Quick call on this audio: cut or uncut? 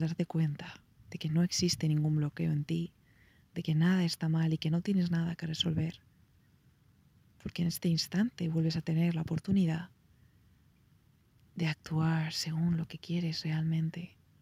uncut